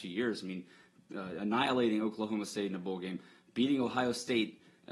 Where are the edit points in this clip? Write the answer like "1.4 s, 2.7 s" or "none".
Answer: none